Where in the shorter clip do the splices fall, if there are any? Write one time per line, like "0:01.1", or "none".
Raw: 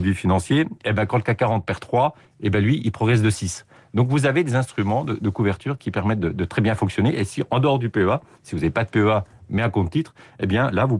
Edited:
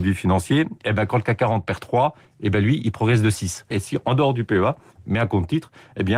0:03.7
0:05.0